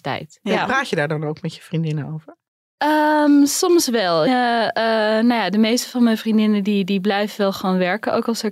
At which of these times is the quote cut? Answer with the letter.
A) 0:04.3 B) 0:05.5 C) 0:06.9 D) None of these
A